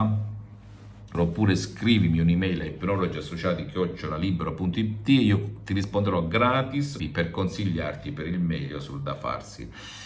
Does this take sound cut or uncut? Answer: cut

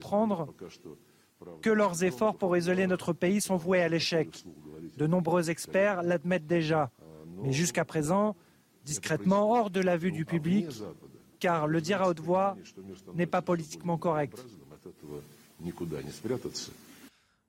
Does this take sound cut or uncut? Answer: uncut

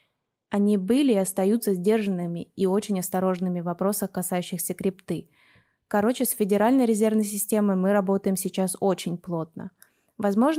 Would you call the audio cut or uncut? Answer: uncut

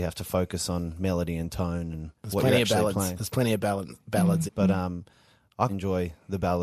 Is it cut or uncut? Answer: cut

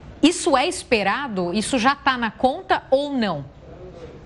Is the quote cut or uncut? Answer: uncut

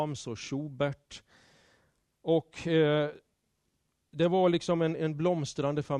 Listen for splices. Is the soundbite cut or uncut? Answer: cut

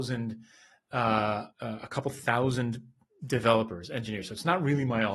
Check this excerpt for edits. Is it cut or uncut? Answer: cut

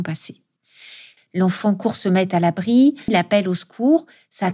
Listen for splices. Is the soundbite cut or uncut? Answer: cut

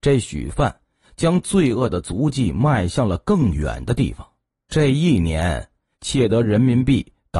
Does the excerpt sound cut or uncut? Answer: cut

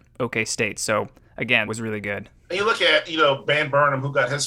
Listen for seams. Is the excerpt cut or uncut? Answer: cut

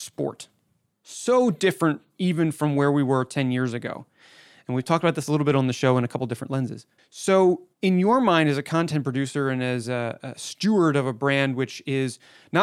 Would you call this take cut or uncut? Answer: cut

